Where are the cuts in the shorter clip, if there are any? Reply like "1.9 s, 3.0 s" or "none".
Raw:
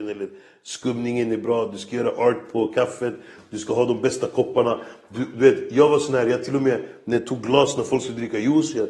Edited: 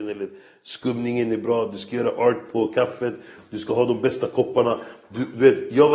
none